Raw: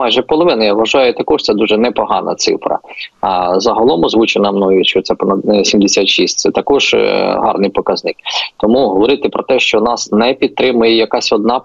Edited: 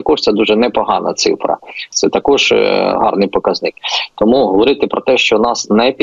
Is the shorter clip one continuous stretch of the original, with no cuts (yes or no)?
no